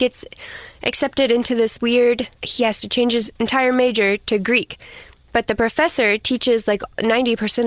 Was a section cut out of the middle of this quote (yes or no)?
no